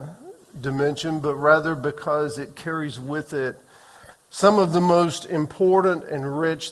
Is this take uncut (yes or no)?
yes